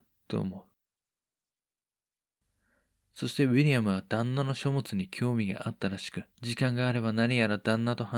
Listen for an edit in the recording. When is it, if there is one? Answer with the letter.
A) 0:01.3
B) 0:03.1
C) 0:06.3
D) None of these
C